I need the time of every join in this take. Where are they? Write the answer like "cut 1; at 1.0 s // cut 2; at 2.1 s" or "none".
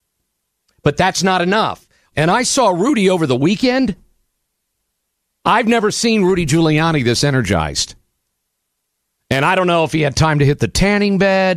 cut 1; at 2.1 s

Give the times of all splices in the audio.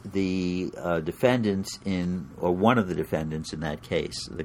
none

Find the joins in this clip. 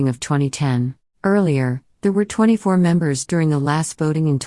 cut 1; at 1.1 s

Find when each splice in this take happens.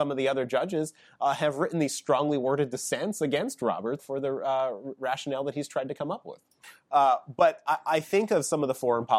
cut 1; at 4.0 s // cut 2; at 6.9 s

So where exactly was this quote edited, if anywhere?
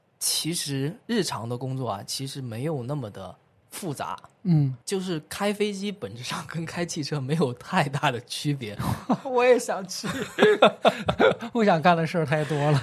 cut 1; at 4.8 s

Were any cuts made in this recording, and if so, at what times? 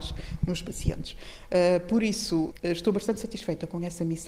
none

